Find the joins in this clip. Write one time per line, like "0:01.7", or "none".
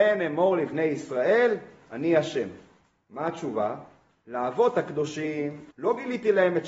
0:05.7